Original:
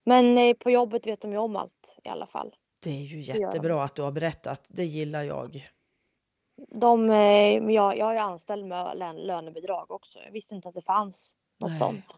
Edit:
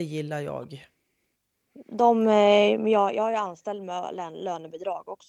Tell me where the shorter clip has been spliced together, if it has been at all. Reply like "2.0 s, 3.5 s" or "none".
none